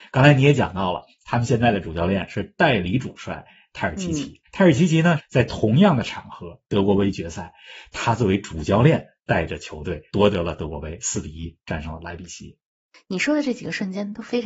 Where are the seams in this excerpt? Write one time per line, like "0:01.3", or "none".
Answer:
0:05.2